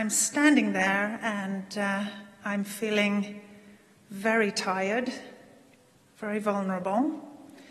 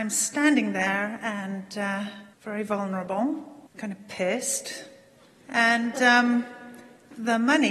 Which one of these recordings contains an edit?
second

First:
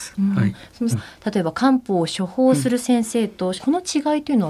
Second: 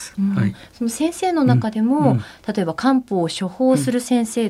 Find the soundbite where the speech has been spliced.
first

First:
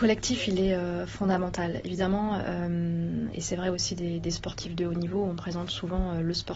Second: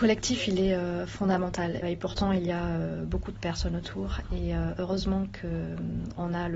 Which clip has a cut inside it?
second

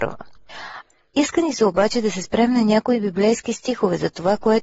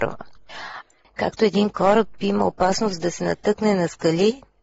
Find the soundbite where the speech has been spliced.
second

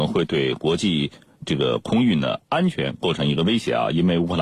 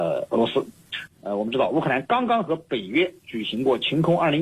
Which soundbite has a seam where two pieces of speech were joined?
second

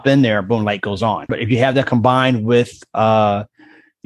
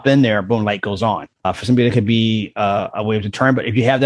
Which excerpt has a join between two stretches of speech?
first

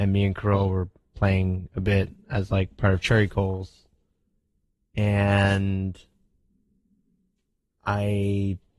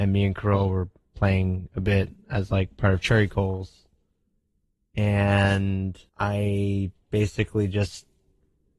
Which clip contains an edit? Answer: second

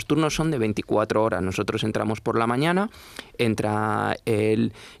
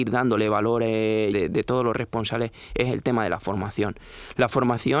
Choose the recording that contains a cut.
second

